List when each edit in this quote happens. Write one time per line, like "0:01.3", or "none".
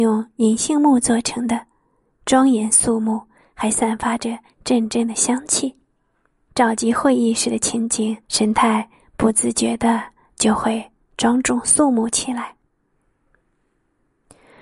0:06.5
0:08.2